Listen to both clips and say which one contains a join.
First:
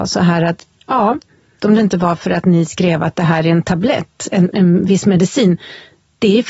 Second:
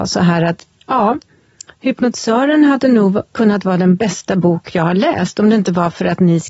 first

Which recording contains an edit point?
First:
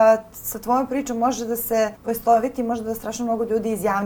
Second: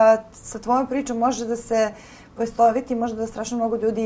first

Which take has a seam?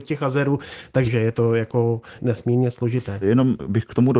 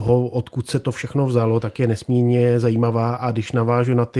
first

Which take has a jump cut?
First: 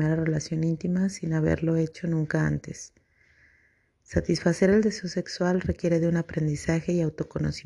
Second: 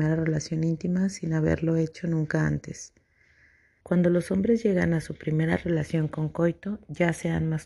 second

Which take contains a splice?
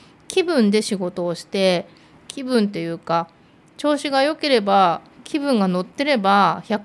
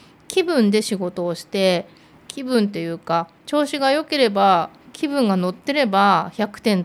second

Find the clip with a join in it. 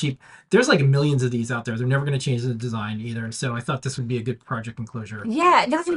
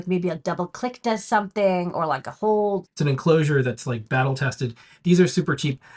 second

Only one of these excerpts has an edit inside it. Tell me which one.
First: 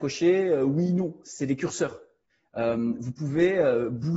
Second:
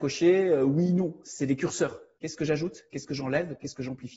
second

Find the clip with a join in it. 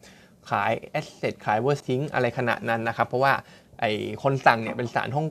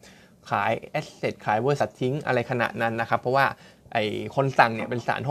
first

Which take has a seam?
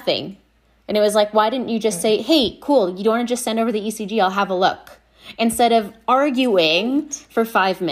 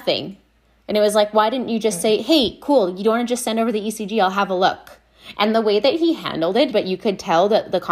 second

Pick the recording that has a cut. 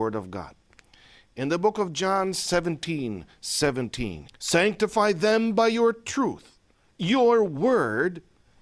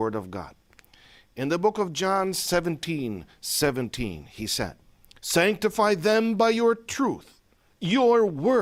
first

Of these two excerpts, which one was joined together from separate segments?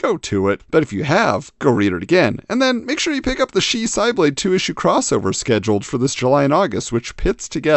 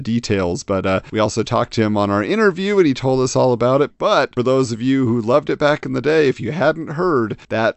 second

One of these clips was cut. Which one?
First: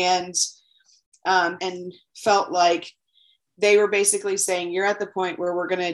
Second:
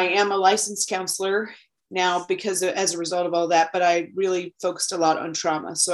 first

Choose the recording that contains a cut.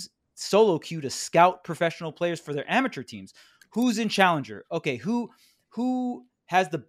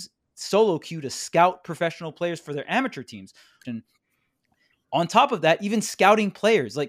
second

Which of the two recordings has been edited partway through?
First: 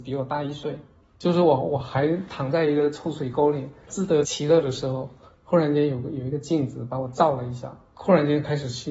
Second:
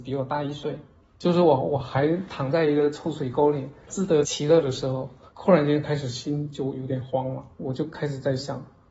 second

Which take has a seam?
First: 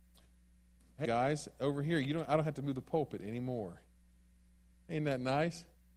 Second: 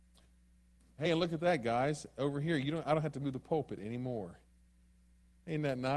first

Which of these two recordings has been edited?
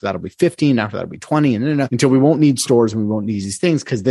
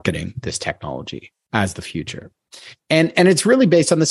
first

